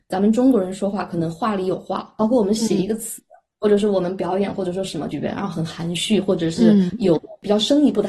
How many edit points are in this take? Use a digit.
1